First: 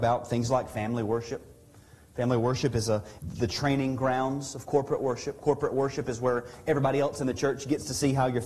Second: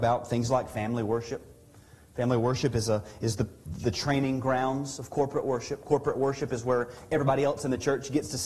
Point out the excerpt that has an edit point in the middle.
first; 1 cut; at 3.2 s

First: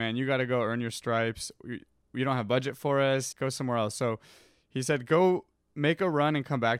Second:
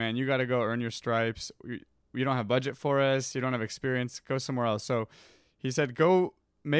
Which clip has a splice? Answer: first; 1 cut; at 3.3 s

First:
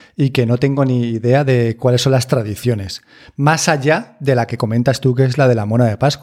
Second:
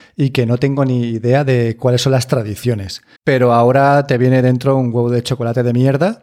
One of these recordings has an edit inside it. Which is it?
second; 1 cut; at 3.2 s

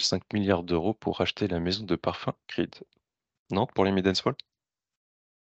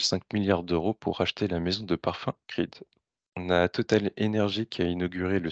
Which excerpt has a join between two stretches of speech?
second; 1 cut; at 3.2 s

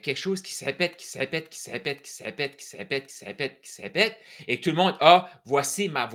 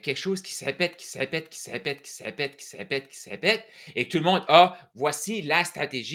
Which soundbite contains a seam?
second; 2 cuts; at 3.1 s, 4.9 s

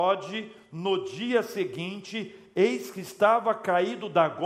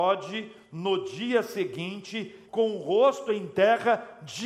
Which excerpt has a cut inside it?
second; 1 cut; at 2.5 s

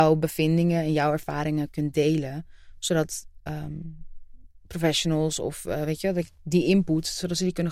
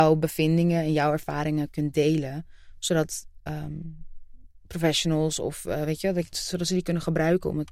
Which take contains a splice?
second; 1 cut; at 6.3 s

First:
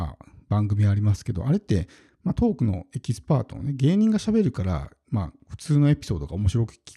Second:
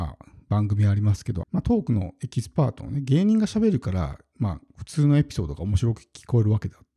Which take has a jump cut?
second; 1 cut; at 1.4 s

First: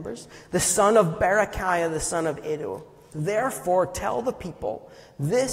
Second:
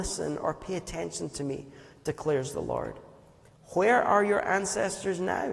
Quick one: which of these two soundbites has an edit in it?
first; 1 cut; at 3.1 s

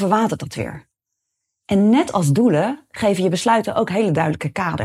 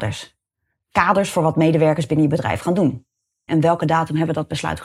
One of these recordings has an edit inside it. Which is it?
second; 1 cut; at 3.5 s

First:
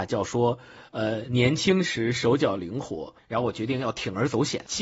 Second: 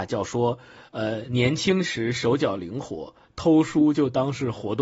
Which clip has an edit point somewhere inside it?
first; 1 cut; at 3.2 s

